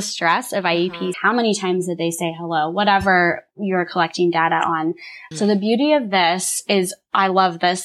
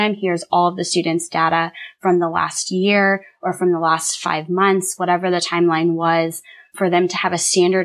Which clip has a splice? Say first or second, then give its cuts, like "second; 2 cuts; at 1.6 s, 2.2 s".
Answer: first; 2 cuts; at 1.1 s, 5.3 s